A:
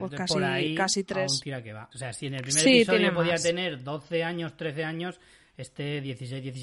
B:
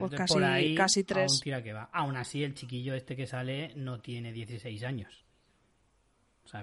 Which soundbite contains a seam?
A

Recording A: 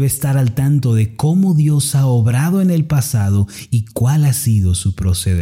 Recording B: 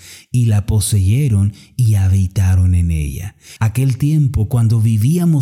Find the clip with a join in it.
B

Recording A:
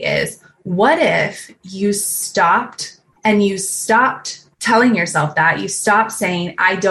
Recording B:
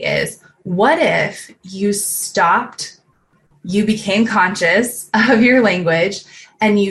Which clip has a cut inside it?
A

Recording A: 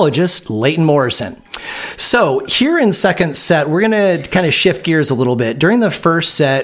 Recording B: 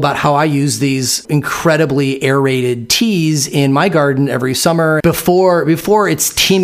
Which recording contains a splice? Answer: B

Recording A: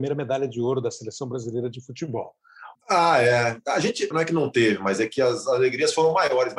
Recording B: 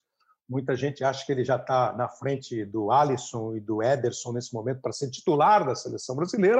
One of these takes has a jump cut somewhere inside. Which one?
A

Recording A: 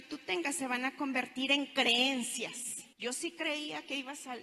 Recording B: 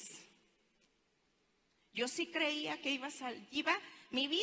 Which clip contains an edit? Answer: A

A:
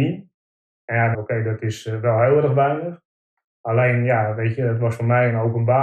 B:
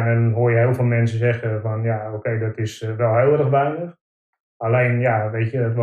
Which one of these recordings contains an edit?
A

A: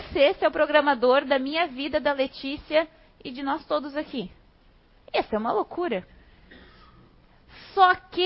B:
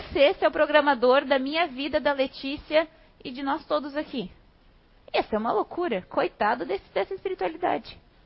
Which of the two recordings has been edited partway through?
A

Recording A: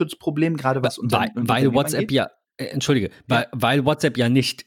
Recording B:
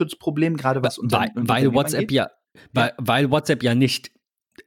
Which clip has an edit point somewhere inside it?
B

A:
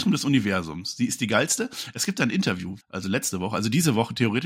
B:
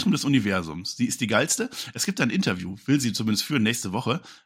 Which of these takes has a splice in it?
A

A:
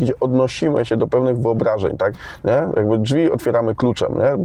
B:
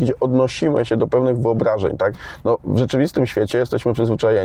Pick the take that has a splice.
A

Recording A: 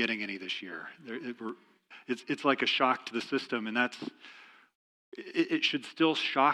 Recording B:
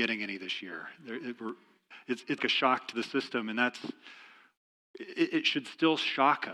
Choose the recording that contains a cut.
B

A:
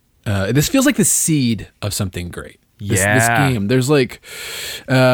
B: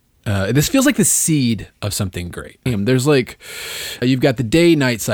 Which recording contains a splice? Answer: B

